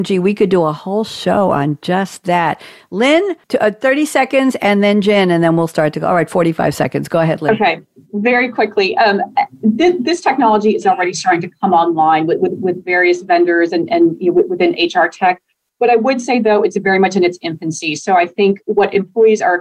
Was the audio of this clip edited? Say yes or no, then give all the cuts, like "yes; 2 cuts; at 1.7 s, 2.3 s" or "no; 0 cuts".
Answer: yes; 1 cut; at 3.4 s